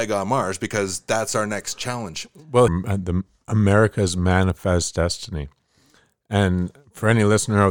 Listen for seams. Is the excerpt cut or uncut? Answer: cut